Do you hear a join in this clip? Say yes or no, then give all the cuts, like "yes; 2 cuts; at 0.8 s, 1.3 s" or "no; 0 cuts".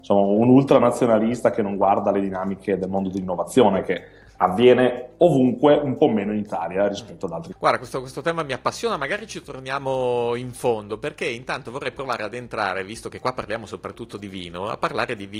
yes; 1 cut; at 7.5 s